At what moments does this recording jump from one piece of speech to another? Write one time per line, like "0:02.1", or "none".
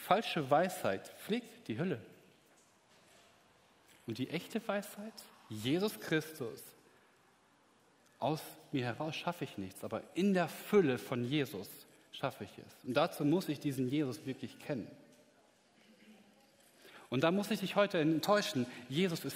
none